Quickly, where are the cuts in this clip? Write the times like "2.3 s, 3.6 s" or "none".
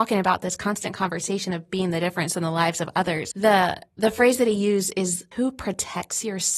3.3 s, 5.3 s